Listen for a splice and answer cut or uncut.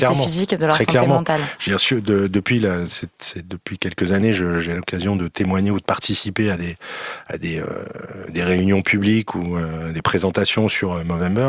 uncut